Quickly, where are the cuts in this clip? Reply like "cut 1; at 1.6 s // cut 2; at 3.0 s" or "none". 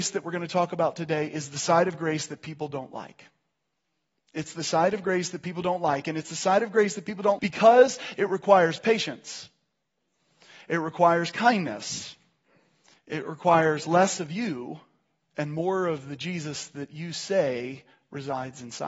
cut 1; at 7.4 s // cut 2; at 13.0 s